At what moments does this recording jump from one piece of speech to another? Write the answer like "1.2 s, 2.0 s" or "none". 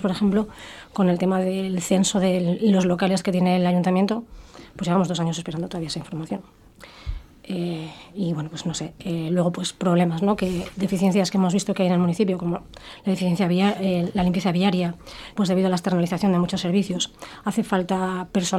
15.3 s